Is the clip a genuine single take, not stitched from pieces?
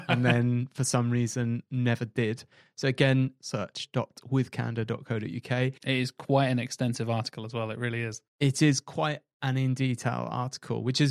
no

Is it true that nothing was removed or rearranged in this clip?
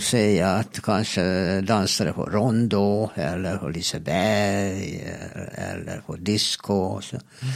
yes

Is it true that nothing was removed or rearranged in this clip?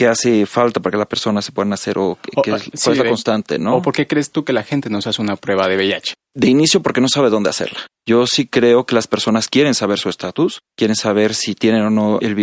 yes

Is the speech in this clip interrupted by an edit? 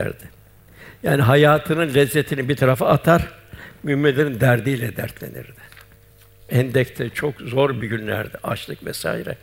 no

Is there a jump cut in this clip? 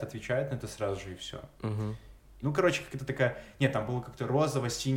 yes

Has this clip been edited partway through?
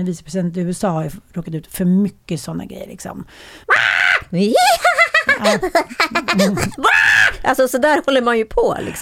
yes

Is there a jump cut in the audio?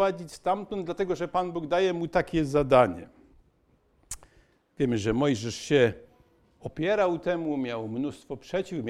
no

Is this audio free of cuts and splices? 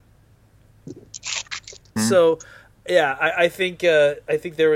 no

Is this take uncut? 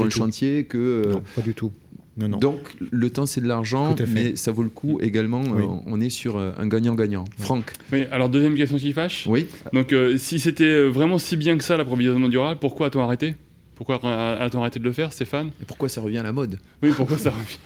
yes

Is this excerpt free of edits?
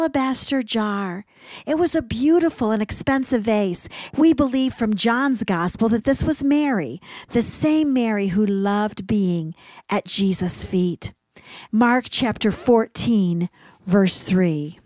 no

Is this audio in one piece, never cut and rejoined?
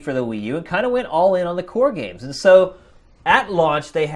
yes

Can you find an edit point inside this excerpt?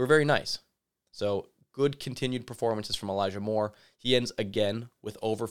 yes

